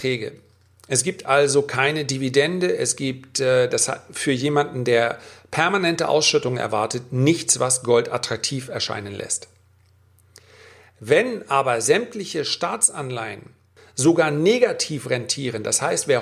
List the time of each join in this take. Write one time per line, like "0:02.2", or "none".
0:13.8